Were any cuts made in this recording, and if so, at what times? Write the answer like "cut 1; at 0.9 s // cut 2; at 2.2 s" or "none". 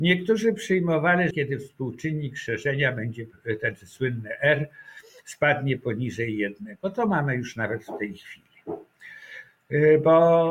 cut 1; at 1.3 s